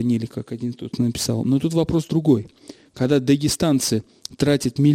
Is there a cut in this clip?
no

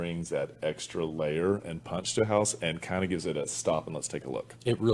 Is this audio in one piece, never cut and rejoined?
yes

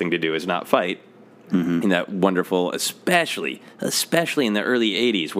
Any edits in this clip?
no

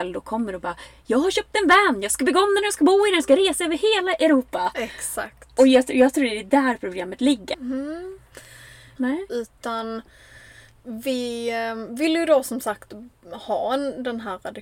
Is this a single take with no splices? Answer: no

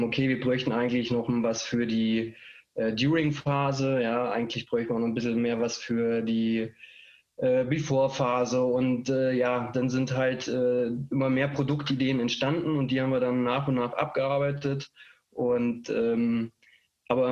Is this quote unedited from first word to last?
yes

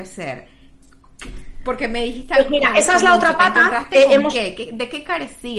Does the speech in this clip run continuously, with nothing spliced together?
yes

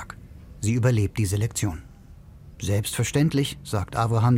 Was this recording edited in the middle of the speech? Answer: yes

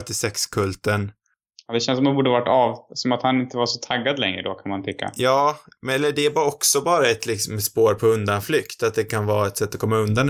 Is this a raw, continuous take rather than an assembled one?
yes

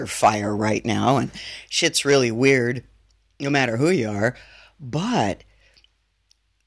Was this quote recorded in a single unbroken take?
yes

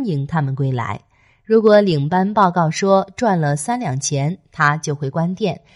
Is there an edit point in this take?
no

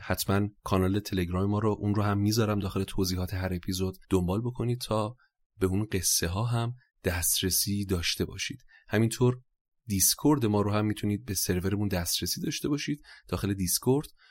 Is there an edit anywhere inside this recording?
yes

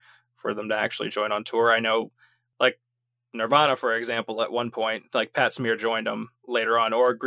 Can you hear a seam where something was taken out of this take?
no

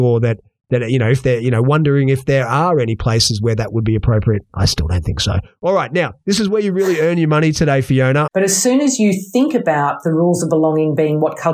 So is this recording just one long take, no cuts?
no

